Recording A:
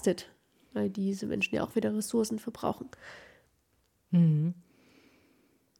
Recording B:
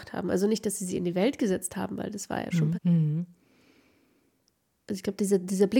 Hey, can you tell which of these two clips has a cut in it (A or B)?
B